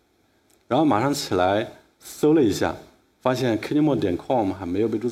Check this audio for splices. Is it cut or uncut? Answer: uncut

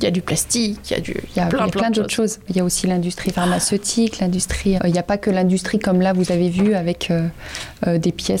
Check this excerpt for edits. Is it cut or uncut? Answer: cut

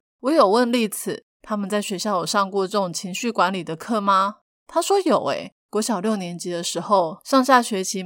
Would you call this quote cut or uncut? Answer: uncut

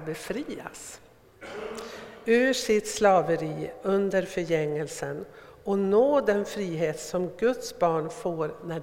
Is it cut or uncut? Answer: uncut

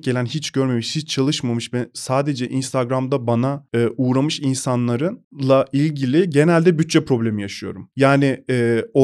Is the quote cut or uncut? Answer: uncut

